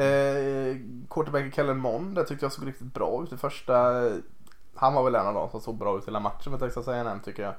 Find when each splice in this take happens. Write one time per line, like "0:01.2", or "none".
none